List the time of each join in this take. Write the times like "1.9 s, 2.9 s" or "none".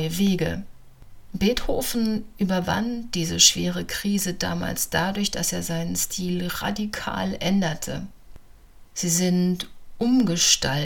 8.8 s